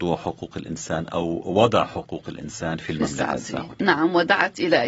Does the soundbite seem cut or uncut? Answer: uncut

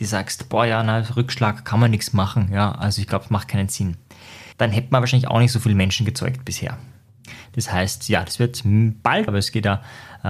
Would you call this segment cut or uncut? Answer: cut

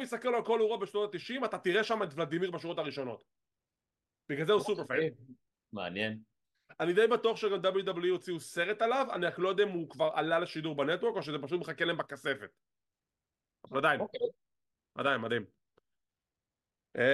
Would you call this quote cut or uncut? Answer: uncut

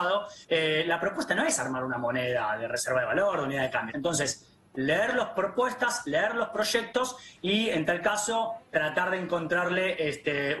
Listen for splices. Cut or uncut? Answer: cut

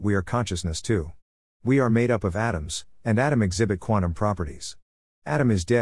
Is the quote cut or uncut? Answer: uncut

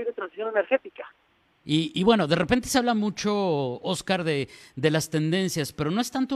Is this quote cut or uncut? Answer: cut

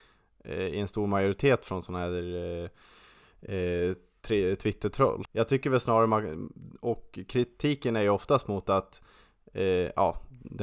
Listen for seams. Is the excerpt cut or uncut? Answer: cut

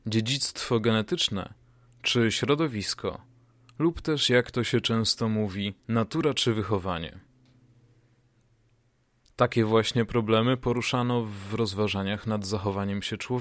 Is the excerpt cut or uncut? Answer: cut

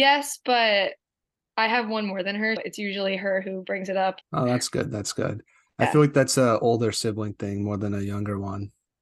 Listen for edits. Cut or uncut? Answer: cut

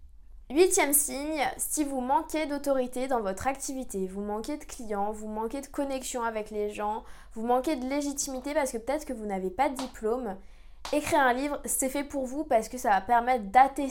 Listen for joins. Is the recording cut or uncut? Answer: uncut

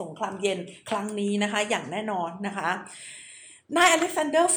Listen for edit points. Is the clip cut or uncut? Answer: uncut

